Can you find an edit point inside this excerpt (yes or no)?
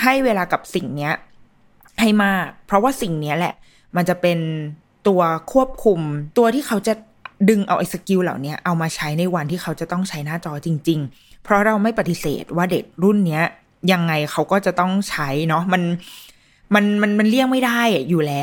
no